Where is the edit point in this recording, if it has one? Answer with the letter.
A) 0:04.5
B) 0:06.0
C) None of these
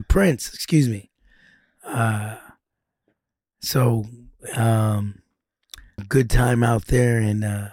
B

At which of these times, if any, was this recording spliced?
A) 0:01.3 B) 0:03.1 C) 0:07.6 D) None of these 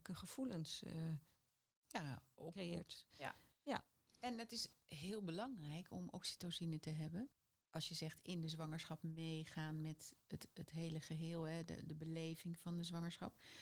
B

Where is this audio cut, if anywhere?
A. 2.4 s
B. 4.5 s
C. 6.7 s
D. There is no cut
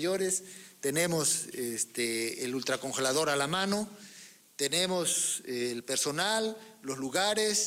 D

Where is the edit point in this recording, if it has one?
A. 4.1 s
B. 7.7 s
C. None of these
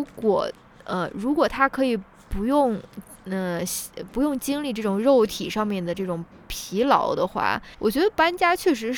B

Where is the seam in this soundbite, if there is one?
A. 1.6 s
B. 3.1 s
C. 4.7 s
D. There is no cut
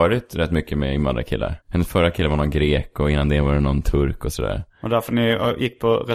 A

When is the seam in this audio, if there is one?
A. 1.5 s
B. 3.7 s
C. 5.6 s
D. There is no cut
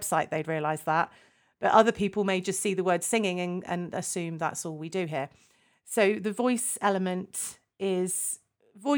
D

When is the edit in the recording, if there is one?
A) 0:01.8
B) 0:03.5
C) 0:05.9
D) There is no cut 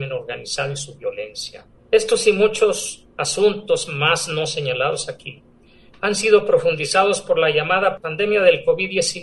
A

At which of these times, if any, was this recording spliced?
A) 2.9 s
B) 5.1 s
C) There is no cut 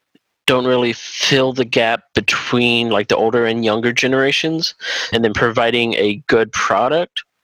B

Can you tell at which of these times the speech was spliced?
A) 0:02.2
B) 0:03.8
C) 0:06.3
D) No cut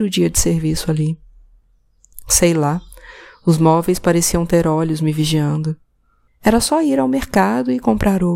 C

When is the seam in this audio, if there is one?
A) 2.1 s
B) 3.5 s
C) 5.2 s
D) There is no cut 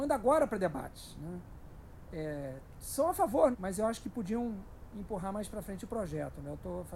B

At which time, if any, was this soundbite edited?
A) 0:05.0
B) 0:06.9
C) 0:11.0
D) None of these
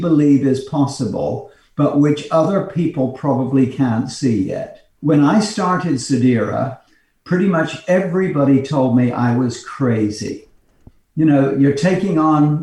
A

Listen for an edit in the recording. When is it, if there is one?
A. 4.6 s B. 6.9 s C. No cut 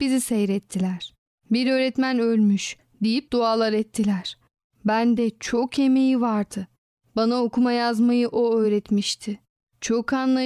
A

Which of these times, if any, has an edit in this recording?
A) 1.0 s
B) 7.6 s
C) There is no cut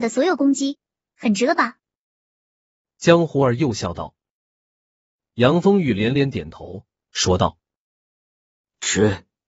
A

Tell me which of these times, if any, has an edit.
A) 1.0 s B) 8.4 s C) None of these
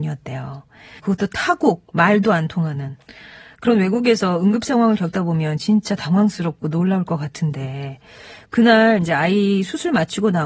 A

